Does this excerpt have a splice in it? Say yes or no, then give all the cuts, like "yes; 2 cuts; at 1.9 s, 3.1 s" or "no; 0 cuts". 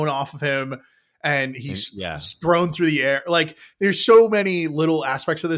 no; 0 cuts